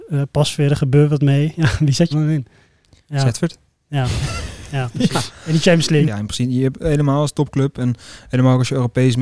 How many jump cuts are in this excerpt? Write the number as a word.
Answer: two